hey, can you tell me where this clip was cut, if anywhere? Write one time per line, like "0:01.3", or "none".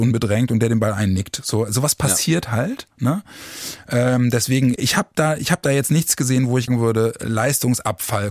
0:04.8
0:06.7